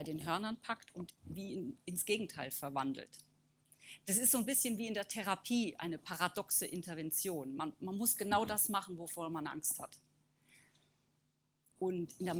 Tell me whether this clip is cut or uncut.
uncut